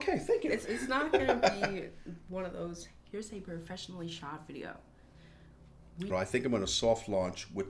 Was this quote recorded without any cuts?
no; 1 cut; at 6.1 s

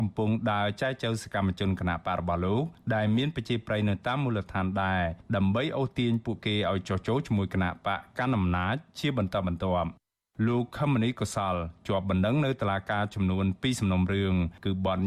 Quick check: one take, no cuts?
yes; 0 cuts

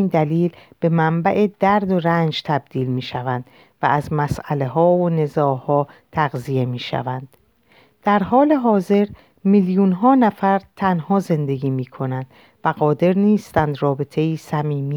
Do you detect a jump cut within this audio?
no; 0 cuts

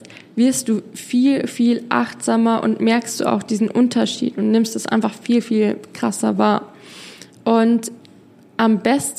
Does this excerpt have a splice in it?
no; 0 cuts

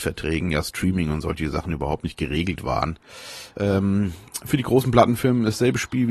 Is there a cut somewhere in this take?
yes; 1 cut; at 3.5 s

